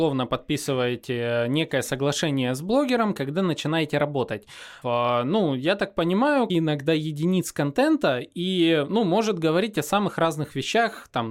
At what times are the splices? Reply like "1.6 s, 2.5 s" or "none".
4.8 s, 6.5 s